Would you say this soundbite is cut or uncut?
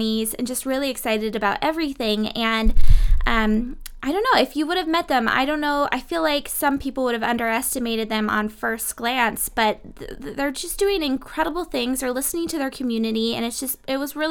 uncut